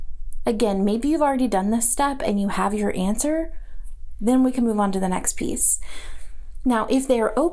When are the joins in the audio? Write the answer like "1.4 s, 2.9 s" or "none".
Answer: none